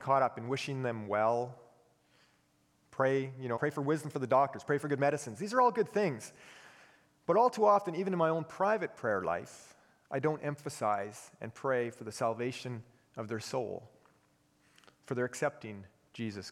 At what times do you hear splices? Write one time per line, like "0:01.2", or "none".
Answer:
0:03.6